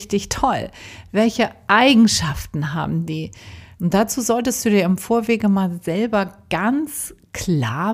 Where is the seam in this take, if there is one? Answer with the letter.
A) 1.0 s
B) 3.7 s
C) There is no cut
B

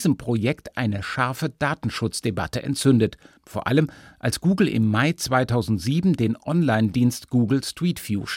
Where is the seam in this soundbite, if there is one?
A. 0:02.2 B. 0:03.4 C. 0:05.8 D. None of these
B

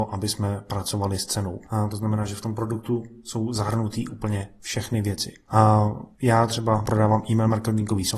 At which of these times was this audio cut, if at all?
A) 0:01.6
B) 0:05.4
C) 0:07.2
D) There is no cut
D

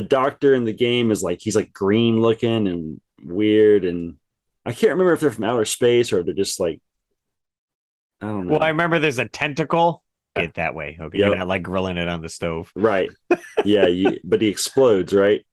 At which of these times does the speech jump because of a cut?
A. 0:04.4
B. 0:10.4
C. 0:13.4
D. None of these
B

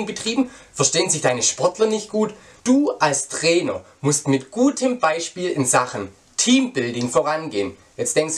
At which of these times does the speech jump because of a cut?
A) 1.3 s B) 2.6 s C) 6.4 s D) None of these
B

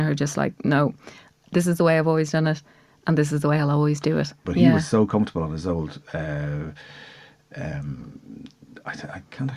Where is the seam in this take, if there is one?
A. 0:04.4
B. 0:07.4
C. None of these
A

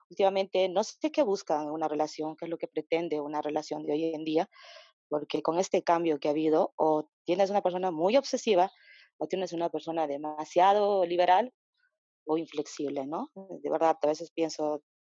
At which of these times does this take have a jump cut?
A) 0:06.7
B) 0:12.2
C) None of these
C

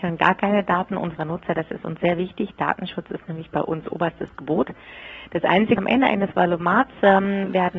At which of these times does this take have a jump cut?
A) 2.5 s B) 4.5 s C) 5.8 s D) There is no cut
C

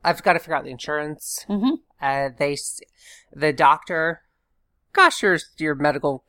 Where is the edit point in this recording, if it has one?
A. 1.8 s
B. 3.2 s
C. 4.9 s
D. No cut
C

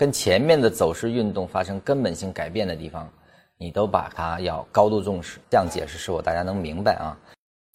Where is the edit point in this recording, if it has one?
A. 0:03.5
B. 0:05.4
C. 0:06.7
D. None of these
B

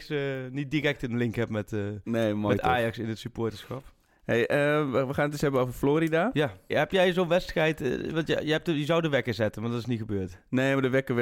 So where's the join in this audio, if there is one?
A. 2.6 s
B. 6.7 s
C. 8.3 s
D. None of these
B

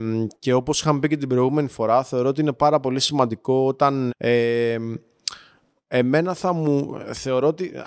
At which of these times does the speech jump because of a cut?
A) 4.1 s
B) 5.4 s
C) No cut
A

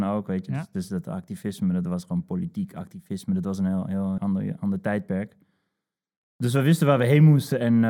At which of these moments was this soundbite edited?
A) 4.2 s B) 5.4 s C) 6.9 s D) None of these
A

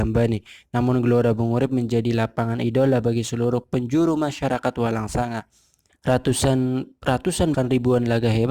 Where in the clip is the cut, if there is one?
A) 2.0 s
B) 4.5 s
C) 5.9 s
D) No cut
C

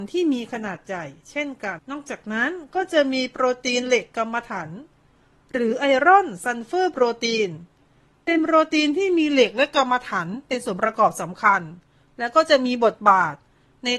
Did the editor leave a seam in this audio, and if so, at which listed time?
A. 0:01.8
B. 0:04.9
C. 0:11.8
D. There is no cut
A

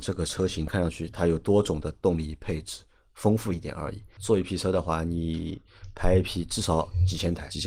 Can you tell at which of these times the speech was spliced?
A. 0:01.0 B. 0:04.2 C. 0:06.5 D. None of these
B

